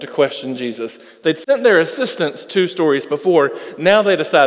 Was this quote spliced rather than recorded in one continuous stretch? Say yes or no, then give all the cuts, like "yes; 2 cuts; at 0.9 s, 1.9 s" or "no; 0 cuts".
no; 0 cuts